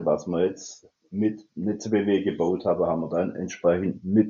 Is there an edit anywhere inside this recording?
no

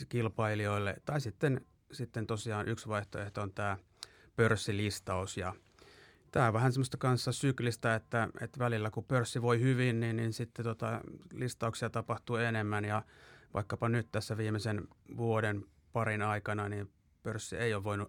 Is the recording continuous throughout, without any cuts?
yes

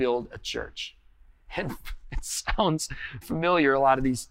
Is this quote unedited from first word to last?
no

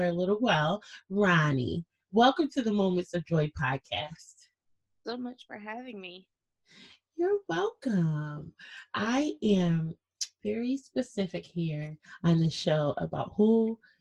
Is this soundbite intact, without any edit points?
yes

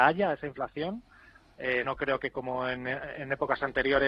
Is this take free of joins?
no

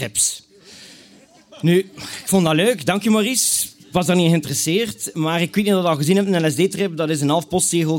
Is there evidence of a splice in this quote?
no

